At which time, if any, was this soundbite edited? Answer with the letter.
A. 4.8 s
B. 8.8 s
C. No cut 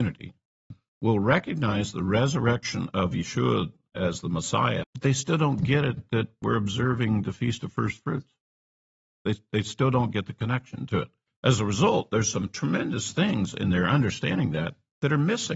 A